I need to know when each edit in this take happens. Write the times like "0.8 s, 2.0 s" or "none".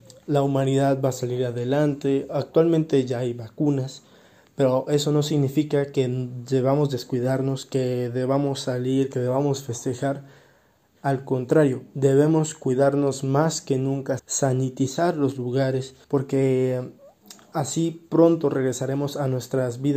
14.2 s, 16.0 s